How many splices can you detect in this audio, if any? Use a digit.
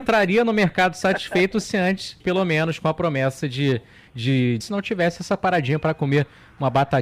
2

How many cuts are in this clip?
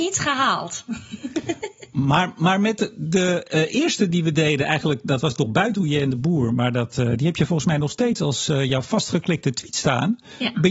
0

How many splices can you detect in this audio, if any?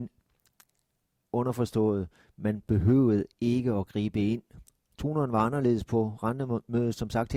0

